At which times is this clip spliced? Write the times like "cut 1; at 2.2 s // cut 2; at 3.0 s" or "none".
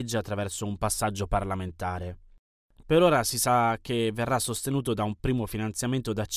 cut 1; at 2.8 s